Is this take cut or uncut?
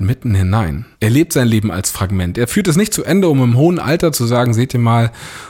cut